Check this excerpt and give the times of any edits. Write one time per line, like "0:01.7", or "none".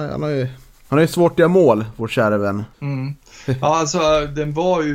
0:02.7